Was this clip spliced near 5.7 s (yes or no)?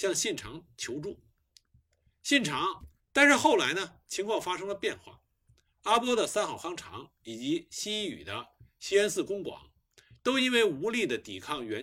no